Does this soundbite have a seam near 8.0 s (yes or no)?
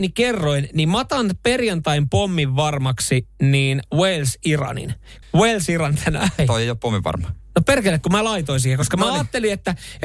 no